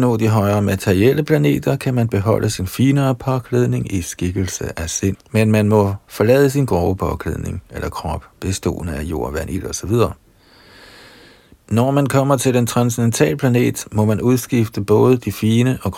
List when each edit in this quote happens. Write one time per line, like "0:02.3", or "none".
0:05.1